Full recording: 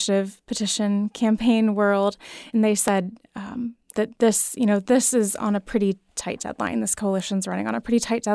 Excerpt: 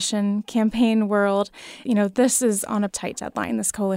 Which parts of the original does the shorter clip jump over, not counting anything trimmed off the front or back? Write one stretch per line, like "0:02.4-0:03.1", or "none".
0:02.5-0:04.6
0:05.6-0:06.1